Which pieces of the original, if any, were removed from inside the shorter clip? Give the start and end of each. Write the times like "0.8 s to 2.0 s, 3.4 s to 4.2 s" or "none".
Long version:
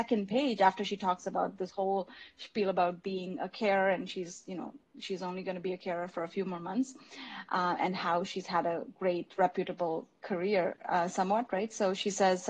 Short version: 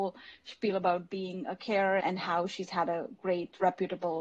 3.9 s to 7.8 s

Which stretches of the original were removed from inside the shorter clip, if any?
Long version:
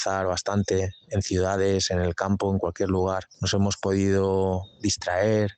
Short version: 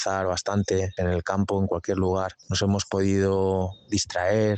1.0 s to 1.9 s

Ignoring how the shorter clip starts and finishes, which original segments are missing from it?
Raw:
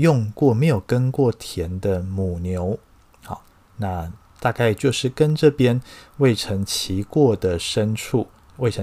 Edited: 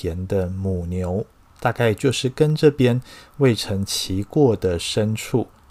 3.0 s to 4.3 s

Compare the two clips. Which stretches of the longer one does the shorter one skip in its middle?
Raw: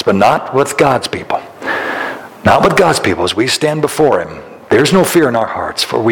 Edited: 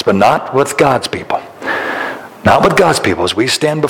none

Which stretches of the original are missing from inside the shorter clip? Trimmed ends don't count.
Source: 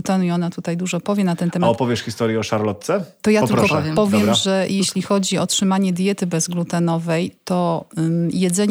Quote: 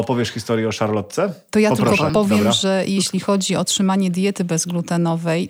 3.8 s to 3.9 s

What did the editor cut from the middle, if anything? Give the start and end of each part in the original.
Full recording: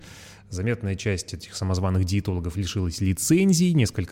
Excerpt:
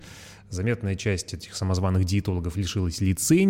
none

